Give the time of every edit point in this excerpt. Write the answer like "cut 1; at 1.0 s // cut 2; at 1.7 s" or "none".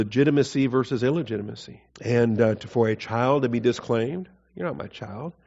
cut 1; at 1.9 s